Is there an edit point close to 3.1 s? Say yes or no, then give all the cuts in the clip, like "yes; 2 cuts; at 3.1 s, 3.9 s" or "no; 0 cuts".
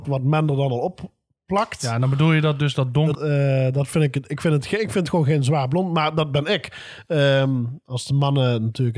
yes; 1 cut; at 3.1 s